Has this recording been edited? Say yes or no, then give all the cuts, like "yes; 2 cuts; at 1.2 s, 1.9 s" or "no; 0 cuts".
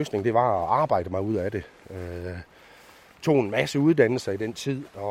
no; 0 cuts